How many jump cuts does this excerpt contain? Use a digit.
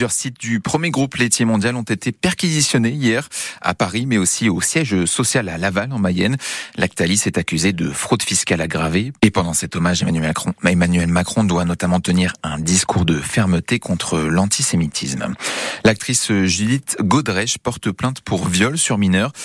1